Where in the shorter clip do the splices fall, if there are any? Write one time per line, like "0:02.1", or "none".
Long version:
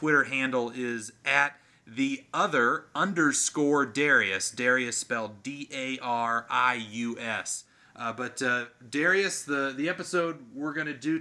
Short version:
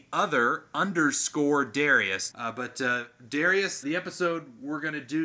0:02.3
0:03.8